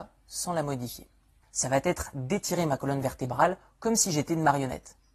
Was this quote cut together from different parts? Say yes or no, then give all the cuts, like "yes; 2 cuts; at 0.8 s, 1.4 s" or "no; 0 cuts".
yes; 1 cut; at 1.4 s